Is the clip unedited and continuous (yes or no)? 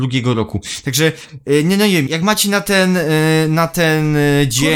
no